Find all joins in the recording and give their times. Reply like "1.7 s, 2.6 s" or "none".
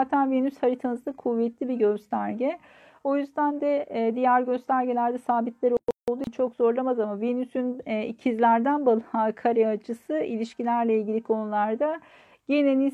none